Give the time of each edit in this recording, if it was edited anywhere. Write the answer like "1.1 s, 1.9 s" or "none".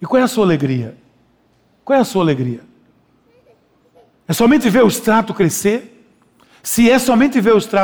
none